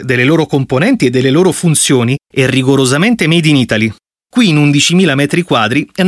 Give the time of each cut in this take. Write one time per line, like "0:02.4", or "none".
0:04.2